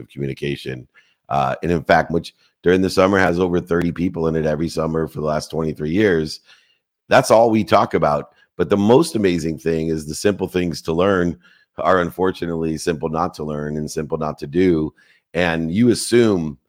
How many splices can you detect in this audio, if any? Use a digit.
1